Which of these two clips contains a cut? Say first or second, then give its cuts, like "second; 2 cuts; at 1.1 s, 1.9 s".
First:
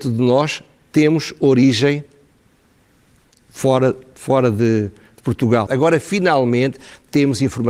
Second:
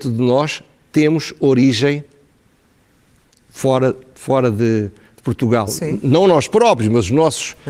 first; 1 cut; at 5.7 s